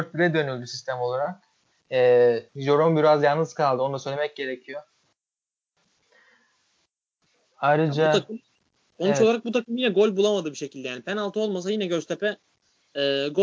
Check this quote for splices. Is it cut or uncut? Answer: cut